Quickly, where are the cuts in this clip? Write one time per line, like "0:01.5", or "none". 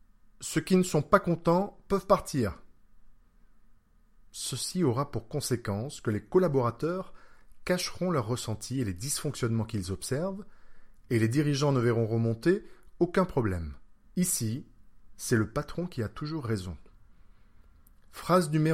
0:14.0